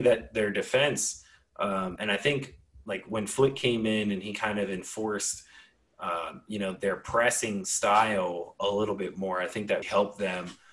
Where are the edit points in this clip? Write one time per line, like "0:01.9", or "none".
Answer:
0:02.0
0:09.8